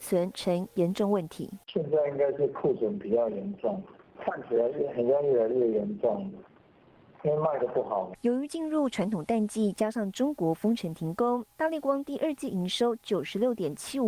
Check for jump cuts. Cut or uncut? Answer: uncut